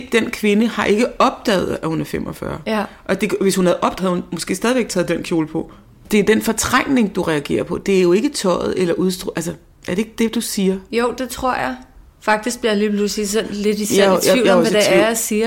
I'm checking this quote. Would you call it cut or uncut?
cut